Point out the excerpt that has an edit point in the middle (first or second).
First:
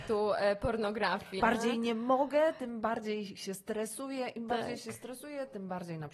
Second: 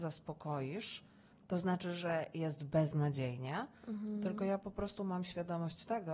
first